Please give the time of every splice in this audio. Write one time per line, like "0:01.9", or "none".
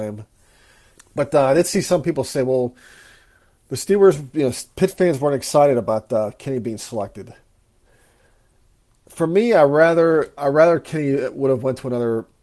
0:01.0